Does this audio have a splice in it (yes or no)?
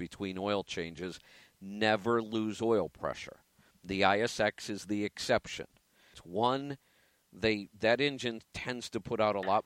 yes